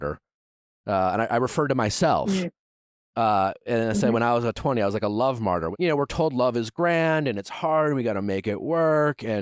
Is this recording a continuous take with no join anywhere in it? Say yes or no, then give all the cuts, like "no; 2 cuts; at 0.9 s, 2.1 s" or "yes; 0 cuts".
yes; 0 cuts